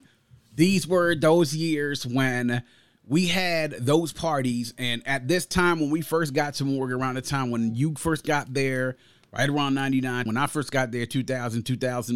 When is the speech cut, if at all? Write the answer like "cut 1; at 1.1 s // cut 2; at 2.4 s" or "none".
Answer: cut 1; at 10.3 s